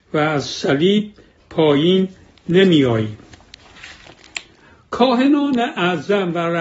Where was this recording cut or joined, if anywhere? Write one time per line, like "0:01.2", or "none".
none